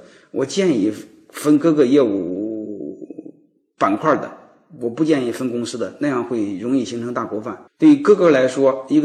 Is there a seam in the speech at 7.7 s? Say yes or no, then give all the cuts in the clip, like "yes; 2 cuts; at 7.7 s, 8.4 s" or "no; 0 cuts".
yes; 1 cut; at 7.7 s